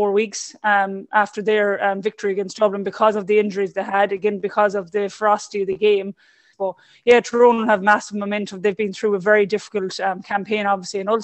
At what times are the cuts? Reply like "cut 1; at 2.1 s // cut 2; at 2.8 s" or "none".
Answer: cut 1; at 6.5 s